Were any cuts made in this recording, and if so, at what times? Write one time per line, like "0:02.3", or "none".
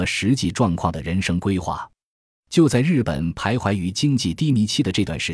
none

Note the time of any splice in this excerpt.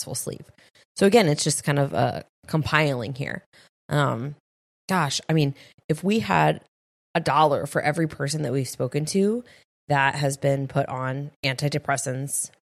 0:02.3

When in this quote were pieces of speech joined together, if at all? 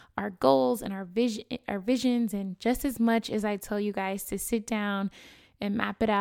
none

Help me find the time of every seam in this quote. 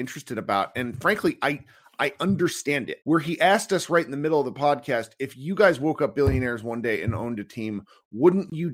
0:03.0

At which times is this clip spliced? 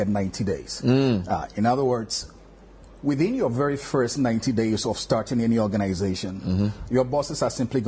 none

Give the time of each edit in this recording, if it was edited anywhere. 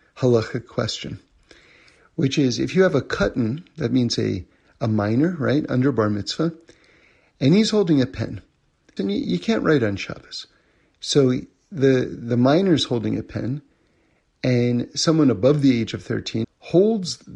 0:09.0
0:16.4

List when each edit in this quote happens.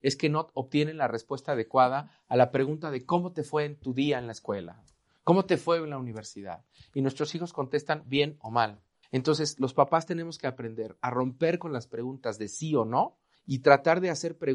0:09.0
0:13.3

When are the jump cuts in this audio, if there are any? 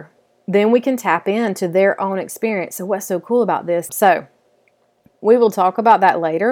0:03.9

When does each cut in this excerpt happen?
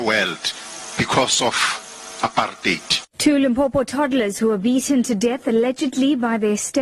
0:03.1

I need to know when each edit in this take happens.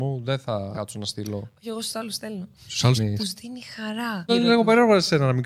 0:03.0
0:04.3

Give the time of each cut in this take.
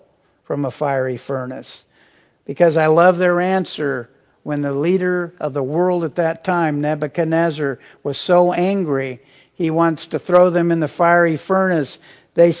none

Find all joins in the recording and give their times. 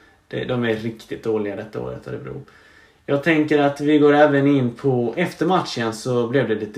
none

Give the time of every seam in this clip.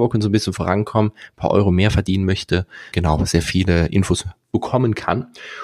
0:02.9

